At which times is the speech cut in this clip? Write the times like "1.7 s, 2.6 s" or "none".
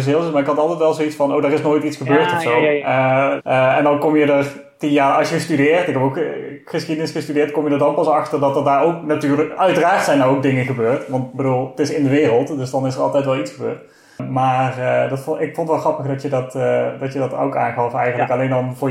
3.4 s